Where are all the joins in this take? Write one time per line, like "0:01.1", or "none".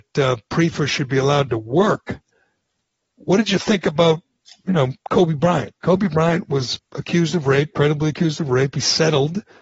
0:06.8